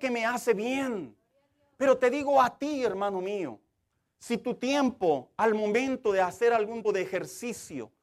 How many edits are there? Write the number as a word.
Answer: one